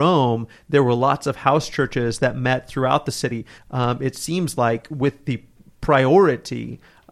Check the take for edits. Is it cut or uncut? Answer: cut